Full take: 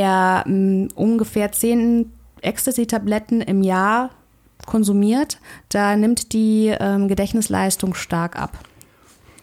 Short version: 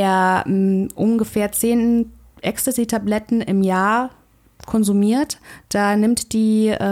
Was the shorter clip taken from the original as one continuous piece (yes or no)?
yes